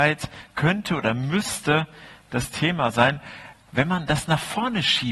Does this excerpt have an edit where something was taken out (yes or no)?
yes